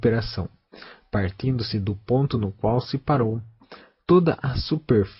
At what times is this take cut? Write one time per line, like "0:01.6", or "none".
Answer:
none